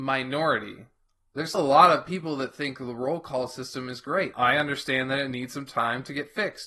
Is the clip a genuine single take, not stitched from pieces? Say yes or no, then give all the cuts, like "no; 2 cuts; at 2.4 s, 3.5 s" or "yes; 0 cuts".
no; 2 cuts; at 1.5 s, 4.3 s